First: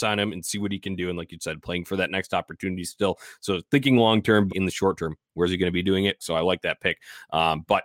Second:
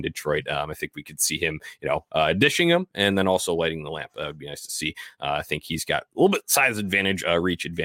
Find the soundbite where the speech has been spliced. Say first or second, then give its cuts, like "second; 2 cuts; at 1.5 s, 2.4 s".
first; 2 cuts; at 4.5 s, 6.2 s